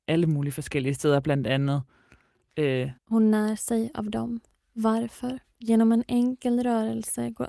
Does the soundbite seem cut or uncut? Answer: cut